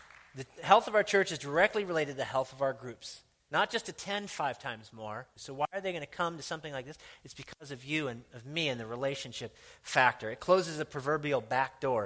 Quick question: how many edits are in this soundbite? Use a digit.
2